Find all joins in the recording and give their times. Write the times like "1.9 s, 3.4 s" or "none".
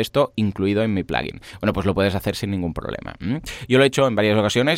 none